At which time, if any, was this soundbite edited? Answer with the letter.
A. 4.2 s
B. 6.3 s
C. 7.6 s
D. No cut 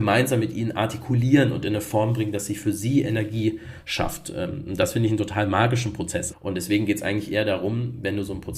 B